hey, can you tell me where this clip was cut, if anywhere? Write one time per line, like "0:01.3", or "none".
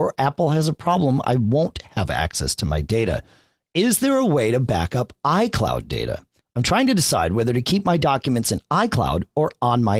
0:06.4

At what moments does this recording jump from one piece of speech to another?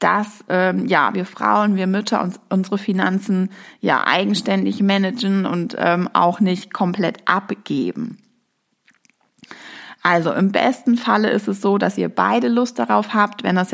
none

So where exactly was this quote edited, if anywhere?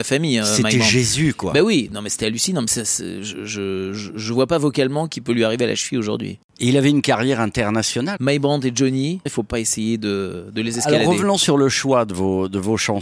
0:08.2
0:09.3

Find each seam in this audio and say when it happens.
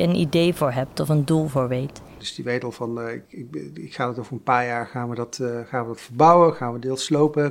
0:02.2
0:03.2

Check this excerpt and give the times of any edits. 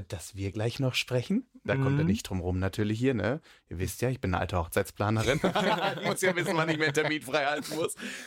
none

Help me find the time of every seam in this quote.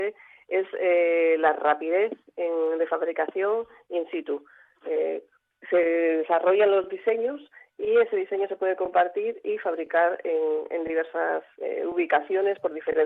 0:11.5

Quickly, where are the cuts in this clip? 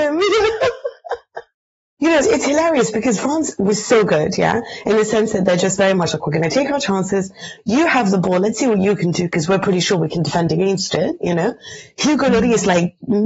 0:02.2

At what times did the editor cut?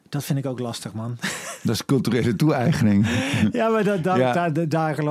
none

